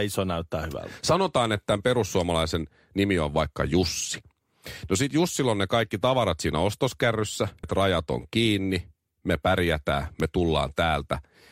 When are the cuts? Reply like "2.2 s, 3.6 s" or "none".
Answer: 7.6 s